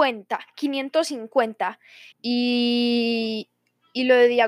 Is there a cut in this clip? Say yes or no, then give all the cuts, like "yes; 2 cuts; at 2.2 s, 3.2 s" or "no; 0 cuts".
yes; 1 cut; at 2.1 s